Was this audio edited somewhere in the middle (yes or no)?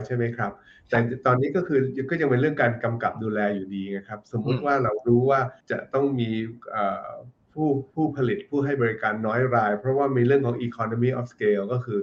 yes